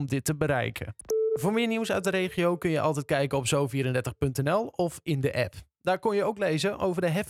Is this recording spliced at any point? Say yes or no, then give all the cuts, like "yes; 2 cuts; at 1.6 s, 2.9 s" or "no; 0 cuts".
no; 0 cuts